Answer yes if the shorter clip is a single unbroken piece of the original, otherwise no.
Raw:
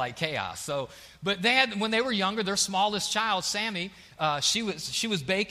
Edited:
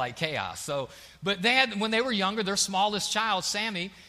yes